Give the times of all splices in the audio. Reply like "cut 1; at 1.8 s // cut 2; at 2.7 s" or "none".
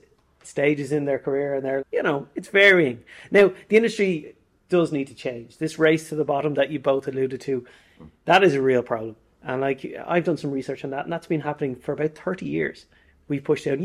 cut 1; at 1.8 s